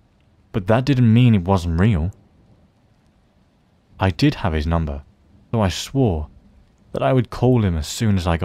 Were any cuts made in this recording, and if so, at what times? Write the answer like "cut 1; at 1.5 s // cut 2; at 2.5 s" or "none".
cut 1; at 3.9 s // cut 2; at 5.5 s